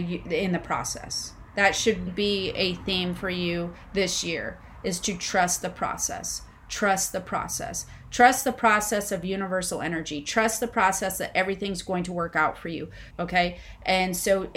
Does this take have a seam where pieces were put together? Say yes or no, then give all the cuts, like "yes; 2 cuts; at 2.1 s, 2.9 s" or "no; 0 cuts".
yes; 2 cuts; at 2.1 s, 13.1 s